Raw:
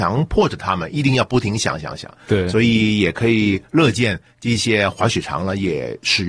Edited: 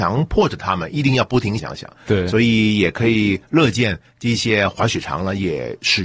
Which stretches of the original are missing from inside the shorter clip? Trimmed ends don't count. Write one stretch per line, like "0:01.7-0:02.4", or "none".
0:01.6-0:01.8